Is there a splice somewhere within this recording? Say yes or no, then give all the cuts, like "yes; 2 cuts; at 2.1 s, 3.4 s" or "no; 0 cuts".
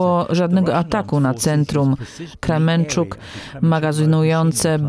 yes; 1 cut; at 2.3 s